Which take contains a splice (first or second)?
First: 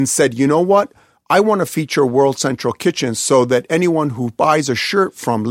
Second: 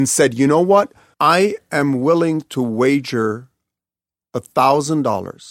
second